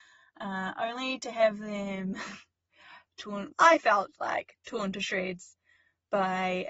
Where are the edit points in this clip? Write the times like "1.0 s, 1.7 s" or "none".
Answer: 3.5 s